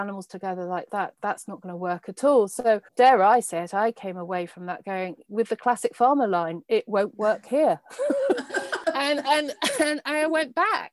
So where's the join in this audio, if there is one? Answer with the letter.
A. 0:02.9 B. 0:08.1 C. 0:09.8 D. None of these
A